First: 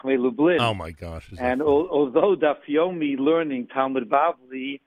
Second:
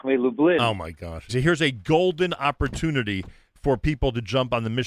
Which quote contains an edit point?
second; 1 cut; at 1.3 s

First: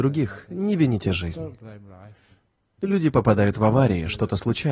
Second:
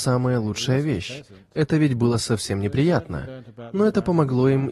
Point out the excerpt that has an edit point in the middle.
first; 1 cut; at 2.8 s

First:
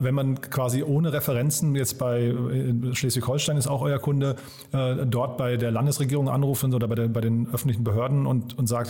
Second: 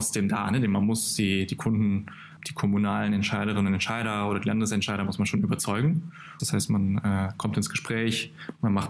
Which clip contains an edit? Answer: second; 2 cuts; at 2.4 s, 6.4 s

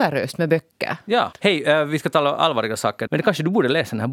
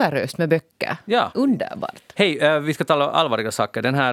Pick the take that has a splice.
first; 2 cuts; at 1.3 s, 3.1 s

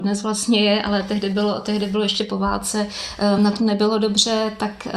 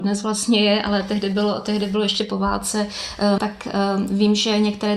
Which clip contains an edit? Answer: second; 1 cut; at 3.4 s

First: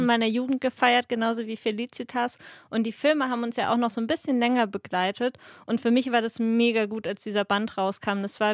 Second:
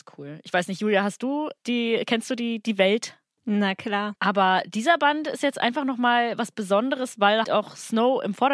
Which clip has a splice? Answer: second; 3 cuts; at 1.6 s, 4.2 s, 7.4 s

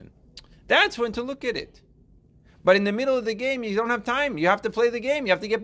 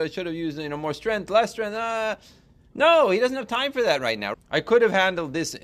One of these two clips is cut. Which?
second; 1 cut; at 4.3 s

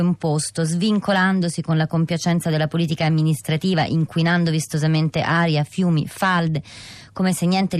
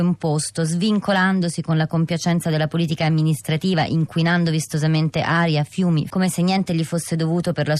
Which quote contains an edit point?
second; 1 cut; at 6.1 s

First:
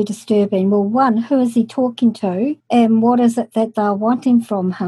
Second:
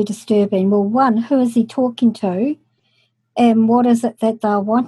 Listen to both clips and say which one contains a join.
first; 1 cut; at 2.6 s

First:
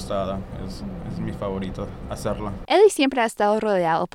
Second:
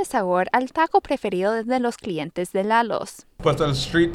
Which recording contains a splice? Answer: first; 1 cut; at 2.7 s

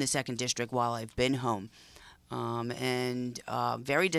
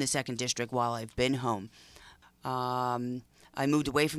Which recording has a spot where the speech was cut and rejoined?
second; 1 cut; at 2.2 s

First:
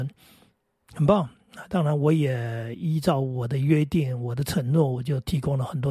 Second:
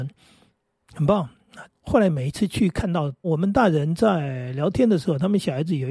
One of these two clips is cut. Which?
second; 2 cuts; at 1.7 s, 3.2 s

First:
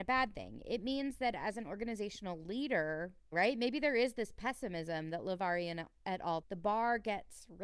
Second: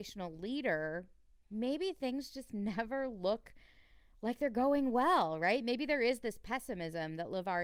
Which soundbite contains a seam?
first; 2 cuts; at 3.3 s, 6.4 s

